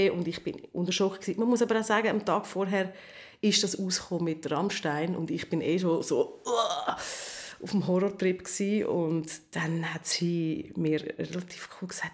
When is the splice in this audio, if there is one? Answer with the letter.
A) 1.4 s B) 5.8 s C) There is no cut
C